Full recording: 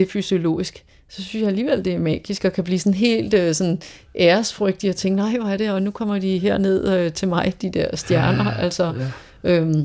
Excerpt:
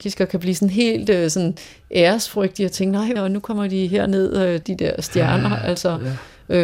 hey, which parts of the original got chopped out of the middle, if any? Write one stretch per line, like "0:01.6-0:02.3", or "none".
0:05.4-0:05.7
0:07.1-0:07.6